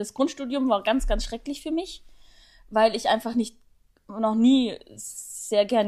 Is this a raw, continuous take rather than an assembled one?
yes; 0 cuts

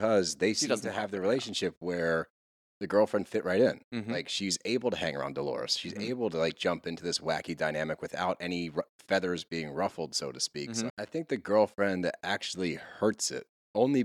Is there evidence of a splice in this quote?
yes; 1 cut; at 10.9 s

